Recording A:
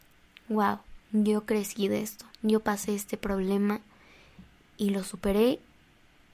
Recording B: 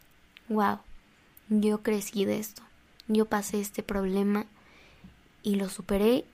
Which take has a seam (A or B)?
A